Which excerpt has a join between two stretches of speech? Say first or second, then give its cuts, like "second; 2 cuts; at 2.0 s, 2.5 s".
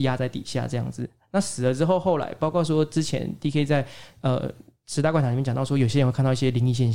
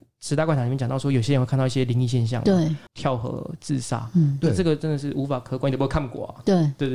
second; 1 cut; at 2.9 s